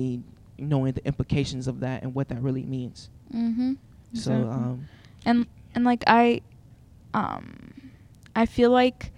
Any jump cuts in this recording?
no; 0 cuts

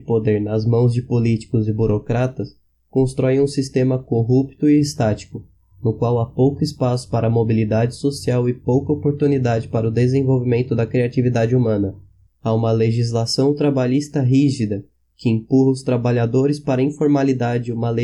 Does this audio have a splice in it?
yes; 1 cut; at 12.3 s

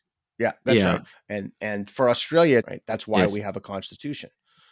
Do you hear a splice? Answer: yes; 2 cuts; at 1.1 s, 2.6 s

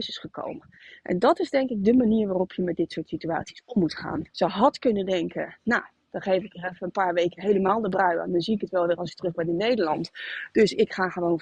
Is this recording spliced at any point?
yes; 1 cut; at 4.3 s

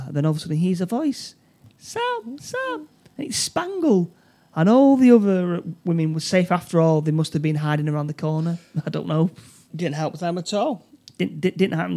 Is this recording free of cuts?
no; 1 cut; at 9.7 s

